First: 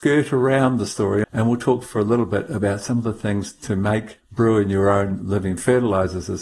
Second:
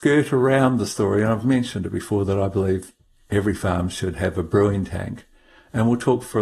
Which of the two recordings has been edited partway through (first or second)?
first